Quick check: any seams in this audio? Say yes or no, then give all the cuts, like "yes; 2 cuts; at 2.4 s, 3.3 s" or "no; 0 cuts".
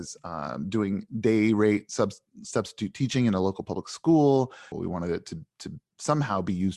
yes; 1 cut; at 4.7 s